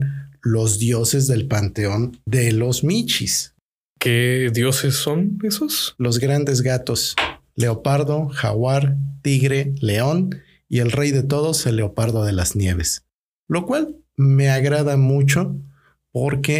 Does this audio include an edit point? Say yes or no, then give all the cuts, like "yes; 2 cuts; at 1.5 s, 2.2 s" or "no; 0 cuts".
no; 0 cuts